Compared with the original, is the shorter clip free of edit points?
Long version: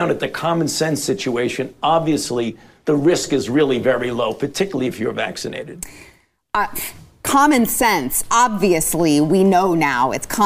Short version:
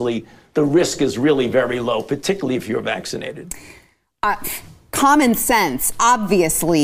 yes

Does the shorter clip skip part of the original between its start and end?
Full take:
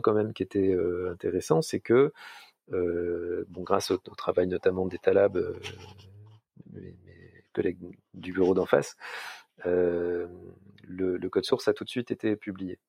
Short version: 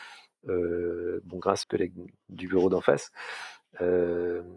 yes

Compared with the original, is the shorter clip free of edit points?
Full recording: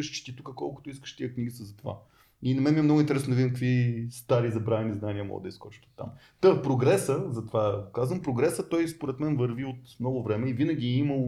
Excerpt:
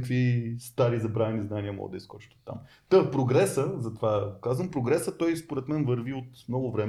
yes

